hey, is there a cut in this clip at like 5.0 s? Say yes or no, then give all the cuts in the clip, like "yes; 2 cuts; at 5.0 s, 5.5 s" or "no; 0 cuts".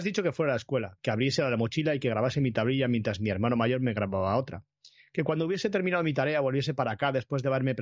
no; 1 cut; at 1.0 s